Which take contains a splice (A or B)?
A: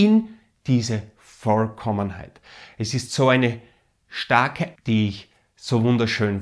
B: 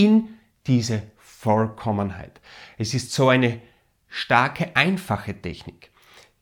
A